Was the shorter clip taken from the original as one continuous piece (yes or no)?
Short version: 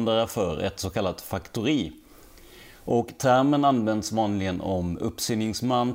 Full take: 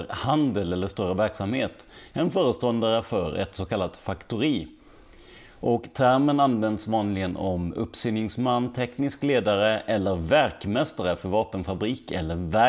yes